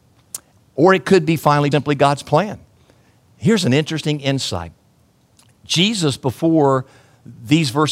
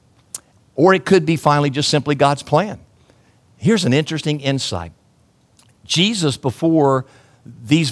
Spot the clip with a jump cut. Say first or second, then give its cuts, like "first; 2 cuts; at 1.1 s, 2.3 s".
first; 1 cut; at 1.7 s